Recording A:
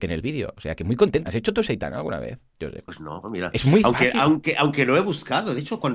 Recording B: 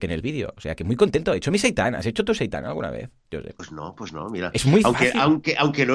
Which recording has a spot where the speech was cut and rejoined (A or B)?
A